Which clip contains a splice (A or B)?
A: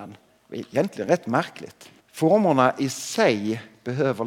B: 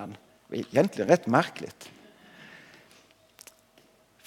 A